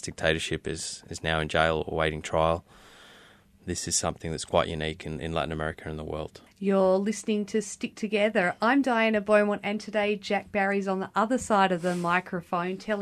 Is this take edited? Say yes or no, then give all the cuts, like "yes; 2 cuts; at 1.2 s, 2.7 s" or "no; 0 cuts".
yes; 1 cut; at 6.5 s